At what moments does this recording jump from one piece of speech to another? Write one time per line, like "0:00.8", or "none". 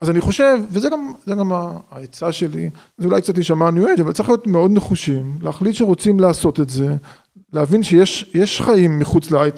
none